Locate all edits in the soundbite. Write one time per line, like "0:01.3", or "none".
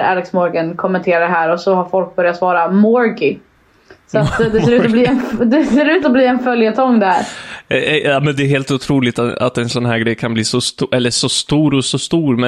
none